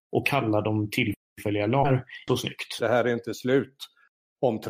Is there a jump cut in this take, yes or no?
yes